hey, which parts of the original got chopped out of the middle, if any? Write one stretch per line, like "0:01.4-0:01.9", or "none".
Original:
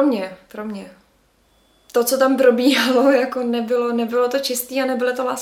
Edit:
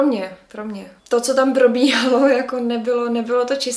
0:01.0-0:01.8